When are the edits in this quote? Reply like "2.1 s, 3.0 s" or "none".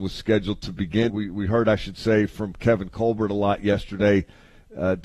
1.1 s